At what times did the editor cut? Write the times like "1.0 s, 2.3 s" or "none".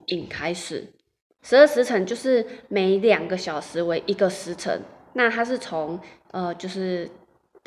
1.4 s